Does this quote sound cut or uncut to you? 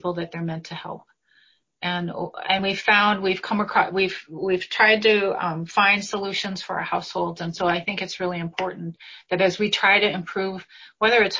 uncut